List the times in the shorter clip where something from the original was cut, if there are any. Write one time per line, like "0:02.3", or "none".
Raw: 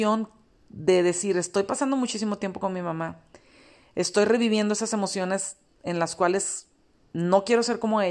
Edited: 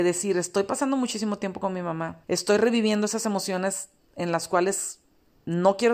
0:02.2